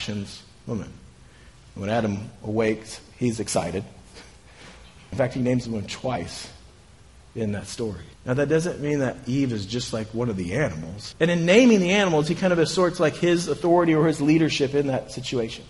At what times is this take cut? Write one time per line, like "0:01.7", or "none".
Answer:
0:05.1
0:08.1
0:11.1